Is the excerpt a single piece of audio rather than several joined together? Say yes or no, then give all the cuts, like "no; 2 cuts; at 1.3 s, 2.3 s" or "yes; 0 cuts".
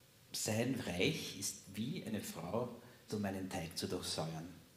no; 1 cut; at 3.1 s